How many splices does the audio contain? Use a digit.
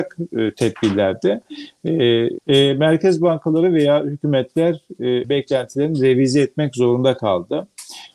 2